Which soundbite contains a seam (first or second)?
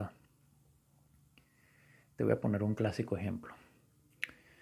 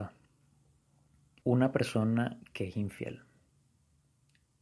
second